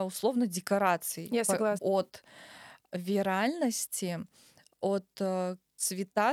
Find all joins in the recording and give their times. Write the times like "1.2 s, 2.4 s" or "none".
1.8 s